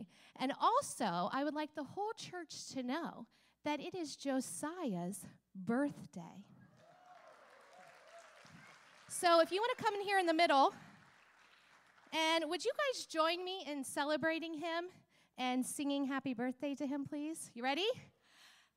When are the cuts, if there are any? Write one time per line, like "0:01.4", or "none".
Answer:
none